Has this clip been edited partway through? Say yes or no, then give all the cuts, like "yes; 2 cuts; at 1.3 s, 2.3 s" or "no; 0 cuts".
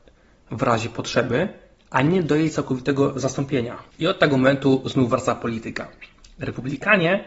yes; 1 cut; at 3.9 s